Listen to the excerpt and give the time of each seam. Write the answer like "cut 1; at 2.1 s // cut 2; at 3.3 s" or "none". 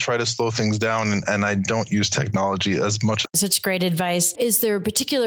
cut 1; at 3.3 s // cut 2; at 4.3 s